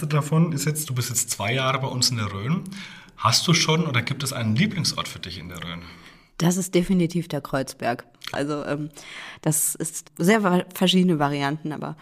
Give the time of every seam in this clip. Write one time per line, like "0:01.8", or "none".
0:08.3
0:10.0